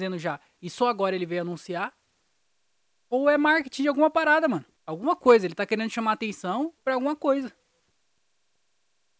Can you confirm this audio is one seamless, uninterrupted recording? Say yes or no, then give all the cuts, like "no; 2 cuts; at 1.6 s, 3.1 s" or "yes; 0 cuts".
no; 2 cuts; at 4.8 s, 6.8 s